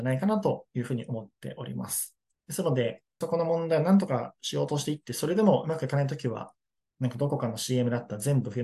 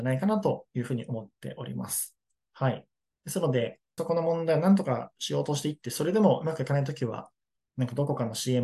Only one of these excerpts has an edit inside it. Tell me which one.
first; 1 cut; at 2.3 s

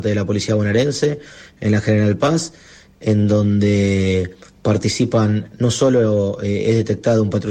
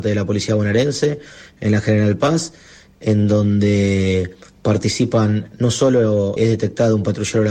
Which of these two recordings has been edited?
second; 1 cut; at 6.4 s

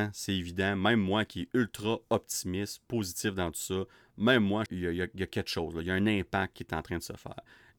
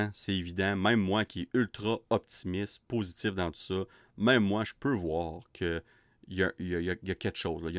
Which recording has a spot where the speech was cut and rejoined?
first; 1 cut; at 4.7 s

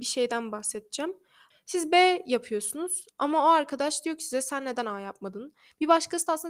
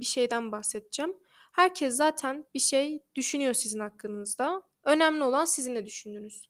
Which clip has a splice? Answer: first; 1 cut; at 1.5 s

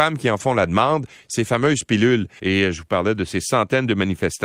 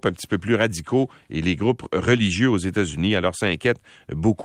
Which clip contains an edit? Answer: first; 1 cut; at 2.4 s

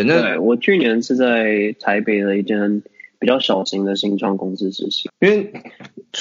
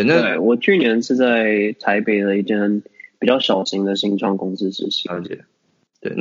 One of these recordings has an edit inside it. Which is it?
first; 1 cut; at 5.1 s

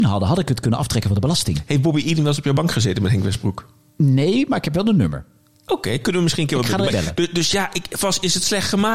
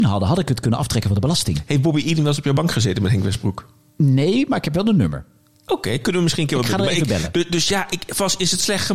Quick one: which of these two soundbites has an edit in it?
first; 1 cut; at 6.9 s

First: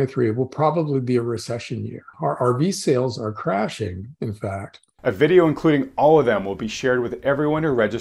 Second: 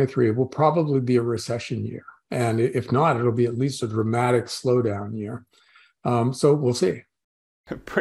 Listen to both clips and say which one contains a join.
first; 2 cuts; at 2.1 s, 5.0 s

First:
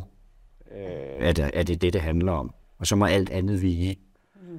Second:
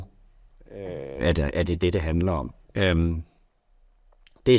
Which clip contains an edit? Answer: second; 1 cut; at 2.6 s

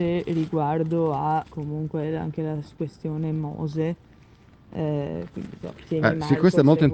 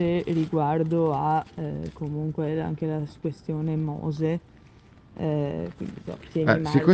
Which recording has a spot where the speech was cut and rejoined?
first; 1 cut; at 1.5 s

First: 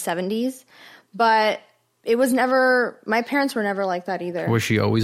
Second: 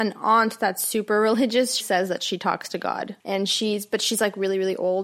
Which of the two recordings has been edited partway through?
second; 2 cuts; at 1.8 s, 3.2 s

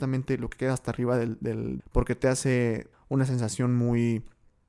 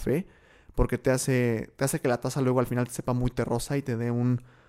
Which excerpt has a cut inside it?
first; 2 cuts; at 1.8 s, 2.9 s

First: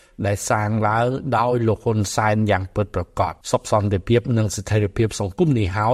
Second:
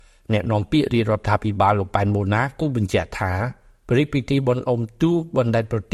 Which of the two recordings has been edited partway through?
first; 1 cut; at 3.4 s

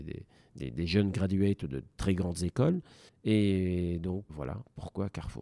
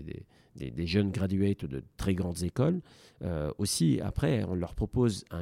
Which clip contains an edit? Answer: first; 2 cuts; at 3.1 s, 4.3 s

